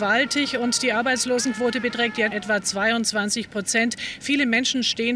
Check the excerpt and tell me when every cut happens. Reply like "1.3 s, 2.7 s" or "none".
2.3 s

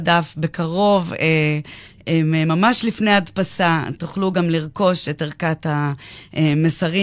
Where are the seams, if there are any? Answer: none

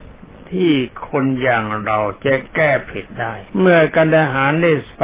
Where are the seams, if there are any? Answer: 3.5 s

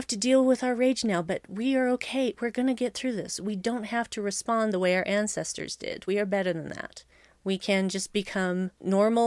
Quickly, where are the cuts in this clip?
none

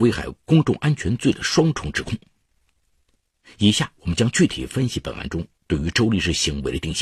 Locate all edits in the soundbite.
none

